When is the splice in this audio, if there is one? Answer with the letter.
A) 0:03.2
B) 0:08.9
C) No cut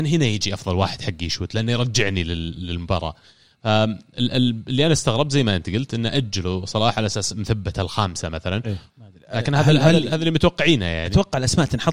B